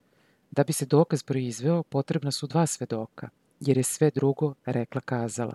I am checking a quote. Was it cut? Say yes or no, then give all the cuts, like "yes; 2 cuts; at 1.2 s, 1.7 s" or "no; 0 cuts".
no; 0 cuts